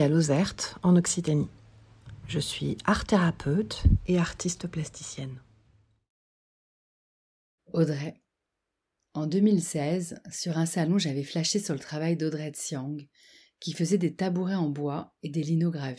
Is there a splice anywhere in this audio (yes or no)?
no